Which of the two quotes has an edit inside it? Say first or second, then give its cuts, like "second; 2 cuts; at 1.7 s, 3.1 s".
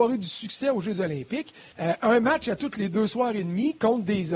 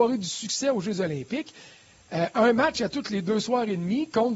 first; 1 cut; at 1.7 s